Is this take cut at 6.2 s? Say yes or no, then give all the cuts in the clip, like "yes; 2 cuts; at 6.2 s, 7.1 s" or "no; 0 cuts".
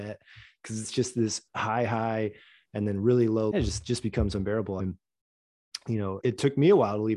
yes; 3 cuts; at 3.5 s, 4.8 s, 6.2 s